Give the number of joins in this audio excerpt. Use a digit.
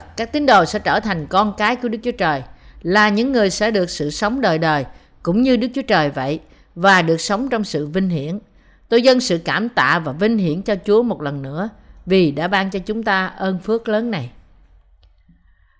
0